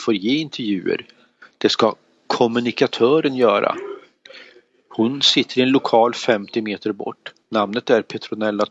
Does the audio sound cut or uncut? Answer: uncut